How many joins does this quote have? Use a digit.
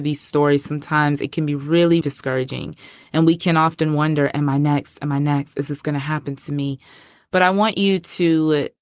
1